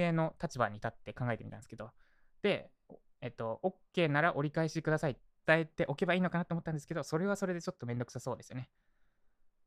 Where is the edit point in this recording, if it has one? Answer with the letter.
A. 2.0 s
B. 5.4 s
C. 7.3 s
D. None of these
B